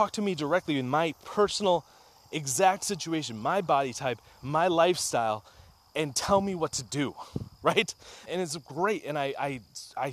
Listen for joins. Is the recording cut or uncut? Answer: cut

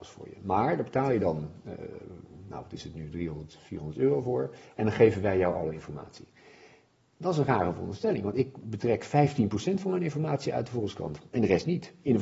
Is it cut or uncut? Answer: uncut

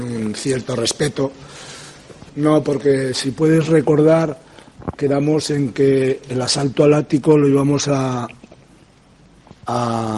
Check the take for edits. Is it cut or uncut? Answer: cut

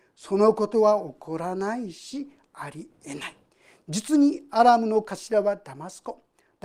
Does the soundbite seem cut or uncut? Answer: uncut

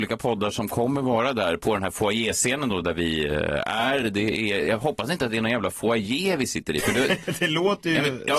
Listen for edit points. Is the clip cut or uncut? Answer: uncut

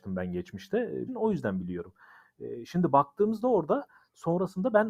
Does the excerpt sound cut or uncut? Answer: cut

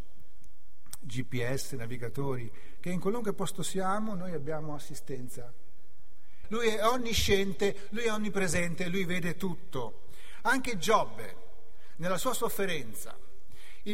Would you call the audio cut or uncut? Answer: cut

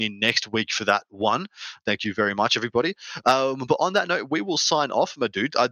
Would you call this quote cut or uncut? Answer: uncut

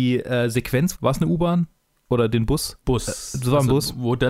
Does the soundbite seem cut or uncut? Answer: cut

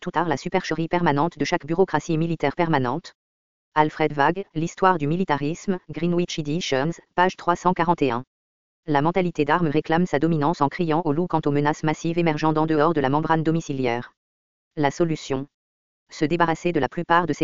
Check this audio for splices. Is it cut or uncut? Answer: cut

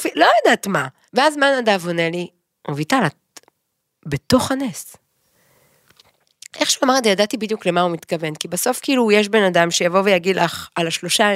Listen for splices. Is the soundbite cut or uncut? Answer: cut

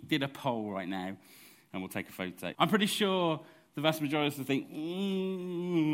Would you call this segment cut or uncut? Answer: cut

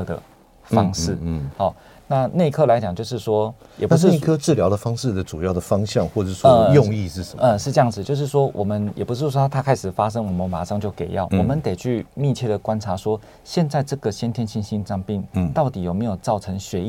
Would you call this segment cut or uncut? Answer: uncut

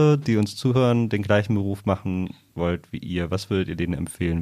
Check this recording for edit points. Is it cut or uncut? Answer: uncut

